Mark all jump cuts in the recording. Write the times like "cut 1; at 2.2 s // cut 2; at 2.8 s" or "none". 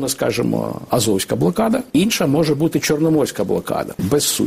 none